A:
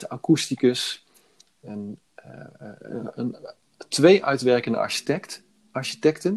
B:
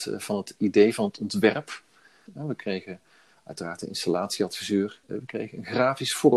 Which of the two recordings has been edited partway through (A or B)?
B